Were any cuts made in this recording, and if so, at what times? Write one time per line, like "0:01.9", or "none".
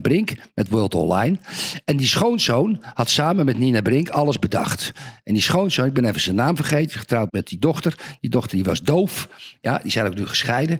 0:07.3